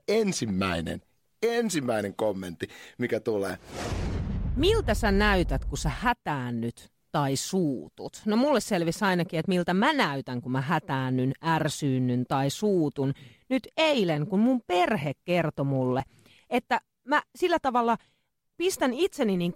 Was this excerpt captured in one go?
yes; 0 cuts

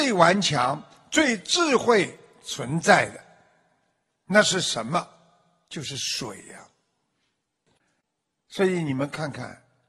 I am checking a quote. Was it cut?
no; 0 cuts

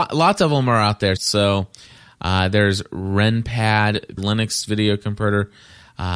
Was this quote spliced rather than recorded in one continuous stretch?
yes; 2 cuts; at 1.2 s, 4.2 s

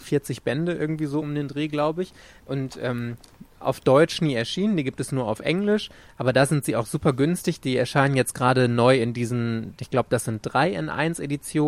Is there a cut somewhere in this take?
no; 0 cuts

